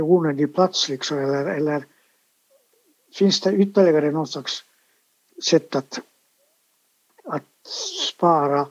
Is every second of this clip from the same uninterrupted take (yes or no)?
yes